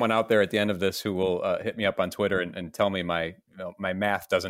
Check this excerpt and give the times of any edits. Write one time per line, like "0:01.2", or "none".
0:03.4